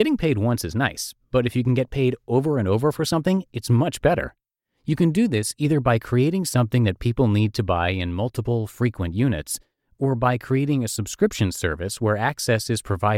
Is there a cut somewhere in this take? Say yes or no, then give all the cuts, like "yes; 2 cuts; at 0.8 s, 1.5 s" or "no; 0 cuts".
no; 0 cuts